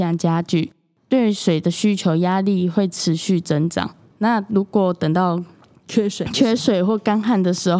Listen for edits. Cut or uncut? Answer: cut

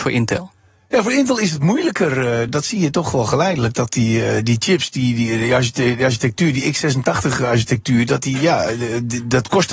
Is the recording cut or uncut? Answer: uncut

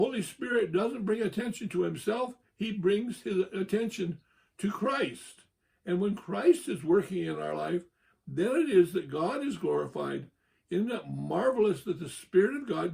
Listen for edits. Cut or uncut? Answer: uncut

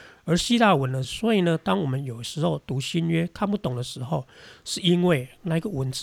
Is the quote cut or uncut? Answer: cut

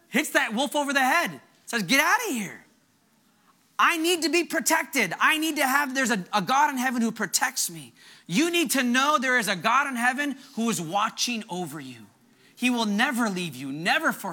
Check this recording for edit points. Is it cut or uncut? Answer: uncut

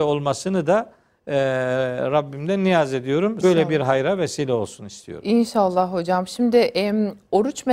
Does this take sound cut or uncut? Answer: cut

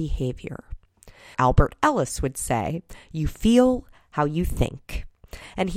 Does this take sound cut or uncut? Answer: cut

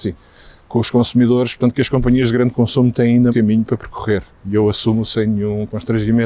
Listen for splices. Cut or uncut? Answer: cut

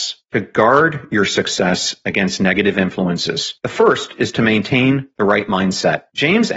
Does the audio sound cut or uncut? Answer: uncut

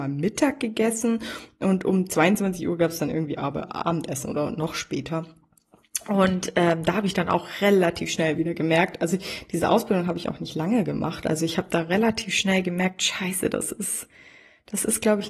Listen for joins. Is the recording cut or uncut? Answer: uncut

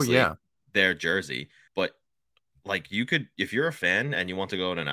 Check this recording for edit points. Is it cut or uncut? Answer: cut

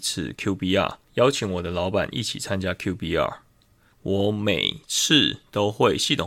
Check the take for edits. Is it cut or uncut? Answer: cut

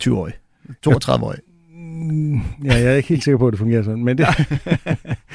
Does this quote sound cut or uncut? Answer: uncut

